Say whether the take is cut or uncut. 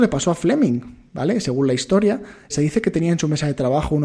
cut